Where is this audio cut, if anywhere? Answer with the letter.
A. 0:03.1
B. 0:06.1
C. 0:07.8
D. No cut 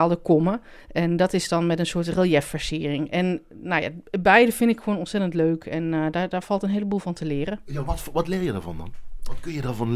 D